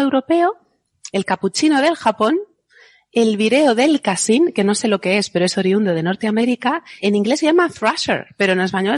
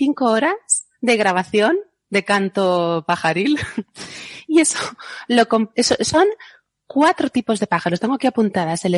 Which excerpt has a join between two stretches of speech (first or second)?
first